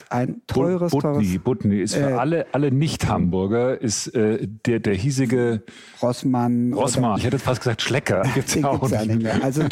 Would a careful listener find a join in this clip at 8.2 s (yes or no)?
yes